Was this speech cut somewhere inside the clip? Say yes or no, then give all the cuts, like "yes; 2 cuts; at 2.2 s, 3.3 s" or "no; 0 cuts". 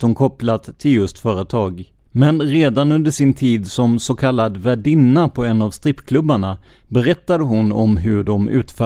yes; 1 cut; at 2.0 s